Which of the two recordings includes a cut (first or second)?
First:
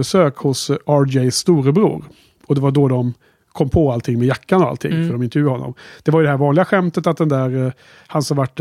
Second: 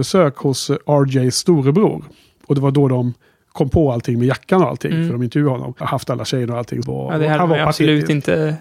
second